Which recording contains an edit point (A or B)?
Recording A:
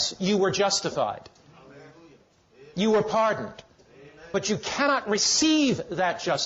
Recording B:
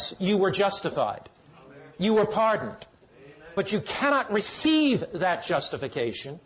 B